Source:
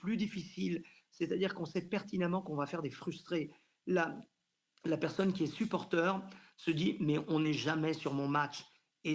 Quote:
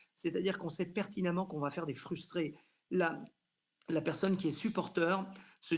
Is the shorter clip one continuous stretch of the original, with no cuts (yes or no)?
yes